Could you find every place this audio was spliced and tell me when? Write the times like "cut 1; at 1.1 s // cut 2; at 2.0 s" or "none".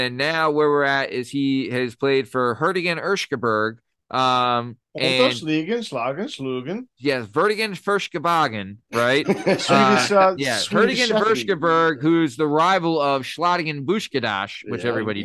none